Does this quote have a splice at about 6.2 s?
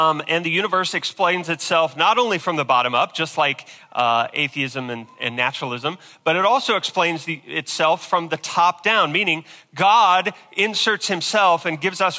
no; 0 cuts

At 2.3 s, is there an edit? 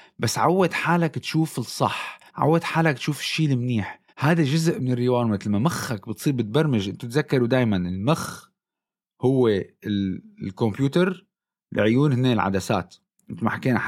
yes; 2 cuts; at 2.3 s, 4.1 s

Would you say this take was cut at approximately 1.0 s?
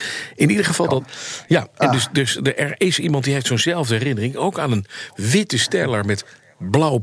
yes; 1 cut; at 1.0 s

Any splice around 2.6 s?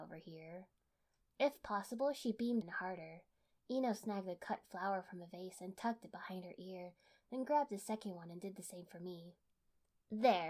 yes; 1 cut; at 2.6 s

